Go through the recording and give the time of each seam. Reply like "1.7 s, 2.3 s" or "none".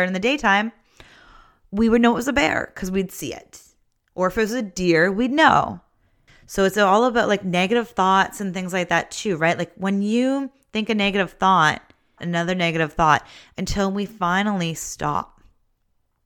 6.3 s, 12.2 s